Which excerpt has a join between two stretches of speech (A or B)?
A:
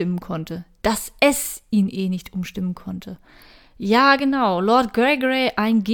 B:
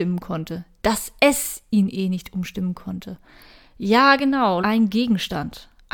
B